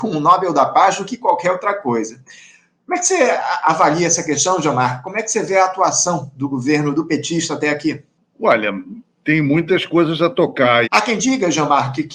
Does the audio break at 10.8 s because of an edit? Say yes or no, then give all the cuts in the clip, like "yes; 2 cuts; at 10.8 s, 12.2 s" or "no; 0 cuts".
yes; 1 cut; at 10.8 s